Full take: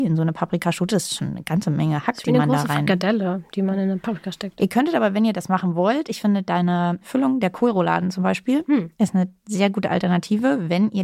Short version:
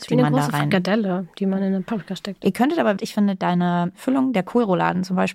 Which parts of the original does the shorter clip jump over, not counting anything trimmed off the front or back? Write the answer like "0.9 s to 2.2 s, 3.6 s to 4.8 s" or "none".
5.1 s to 6.0 s